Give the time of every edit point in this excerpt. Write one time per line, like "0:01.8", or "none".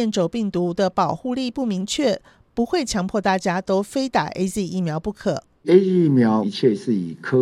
0:06.4

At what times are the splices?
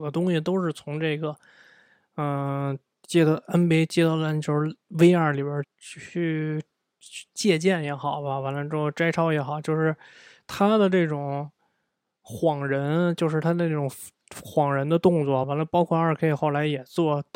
0:05.6
0:15.4

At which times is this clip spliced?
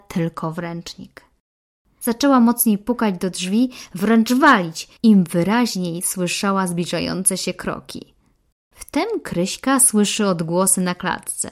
0:05.0
0:08.5

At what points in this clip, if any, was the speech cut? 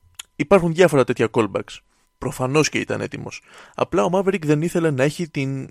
0:02.0

